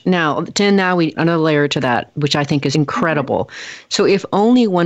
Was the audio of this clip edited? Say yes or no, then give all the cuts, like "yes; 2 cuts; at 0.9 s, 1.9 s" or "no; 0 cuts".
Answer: yes; 2 cuts; at 1.1 s, 2.7 s